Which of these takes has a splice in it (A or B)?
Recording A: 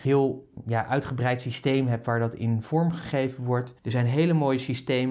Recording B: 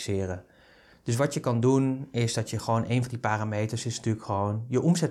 A